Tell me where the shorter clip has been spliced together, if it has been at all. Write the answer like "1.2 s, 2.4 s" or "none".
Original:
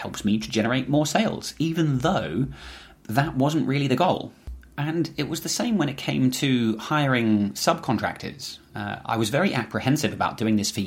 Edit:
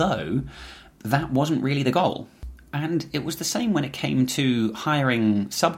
none